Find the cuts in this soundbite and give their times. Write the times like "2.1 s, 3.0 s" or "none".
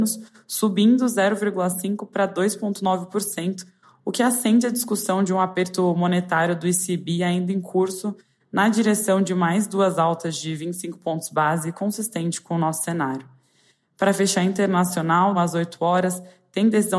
15.3 s